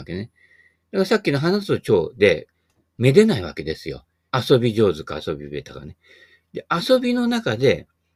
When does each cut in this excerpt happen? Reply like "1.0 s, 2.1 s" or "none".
4.3 s

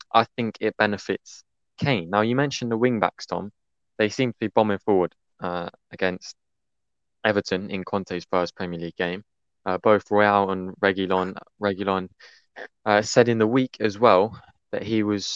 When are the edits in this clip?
none

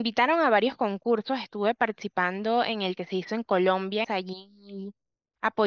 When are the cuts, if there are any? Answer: 4.0 s

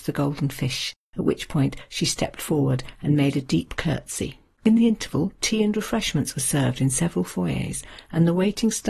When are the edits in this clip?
4.6 s

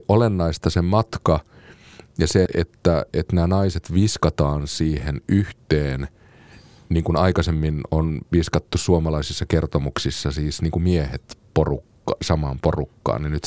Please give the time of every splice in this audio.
2.5 s

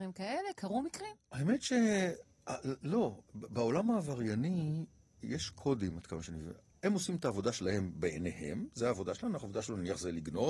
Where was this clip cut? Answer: none

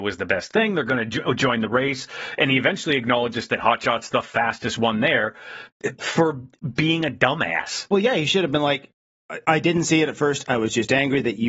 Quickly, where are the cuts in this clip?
6.0 s

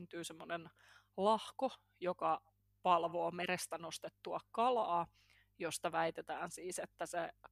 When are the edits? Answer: none

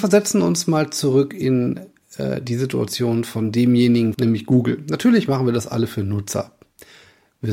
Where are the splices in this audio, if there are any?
4.1 s

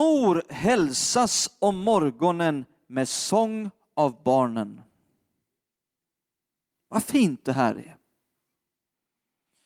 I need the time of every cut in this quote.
none

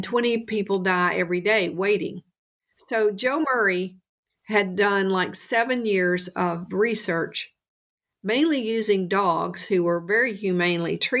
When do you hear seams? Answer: 2.7 s

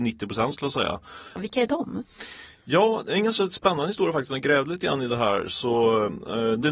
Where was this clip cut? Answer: 1.4 s

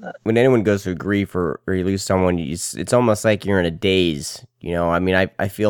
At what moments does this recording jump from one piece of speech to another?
none

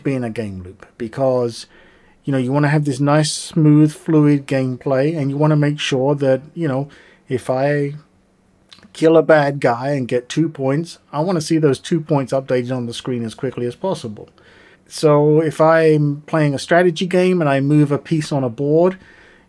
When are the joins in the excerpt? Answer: 14.7 s

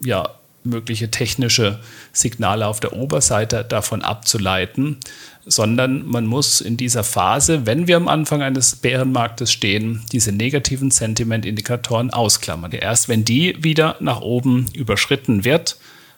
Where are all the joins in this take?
12.7 s

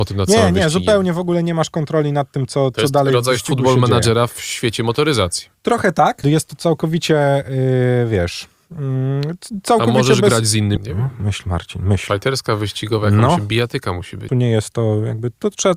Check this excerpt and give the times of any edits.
6.2 s, 10.8 s, 14.3 s

